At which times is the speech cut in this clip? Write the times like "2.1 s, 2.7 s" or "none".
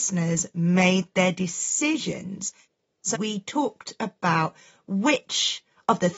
3.1 s